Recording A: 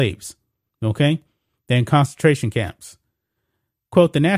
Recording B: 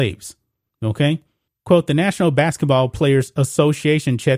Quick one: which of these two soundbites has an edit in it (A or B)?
B